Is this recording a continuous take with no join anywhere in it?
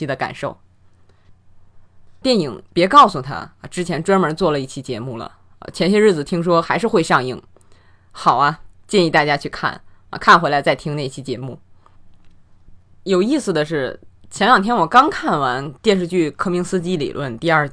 no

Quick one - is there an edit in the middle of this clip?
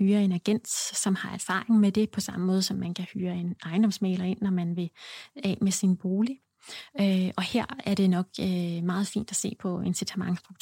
no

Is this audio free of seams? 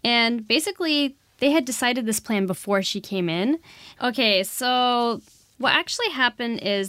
no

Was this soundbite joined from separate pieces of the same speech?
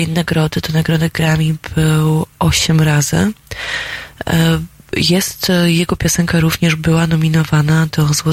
no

